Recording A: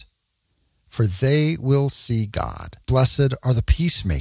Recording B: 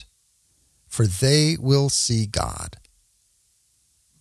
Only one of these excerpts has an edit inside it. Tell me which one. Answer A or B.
A